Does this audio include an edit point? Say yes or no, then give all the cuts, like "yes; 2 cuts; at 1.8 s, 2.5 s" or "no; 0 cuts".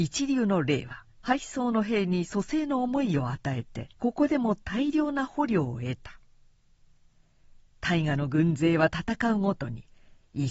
yes; 2 cuts; at 1.1 s, 3.9 s